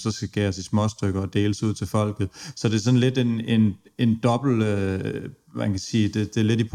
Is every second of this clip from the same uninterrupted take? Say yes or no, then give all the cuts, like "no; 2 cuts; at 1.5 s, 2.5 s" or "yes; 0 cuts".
yes; 0 cuts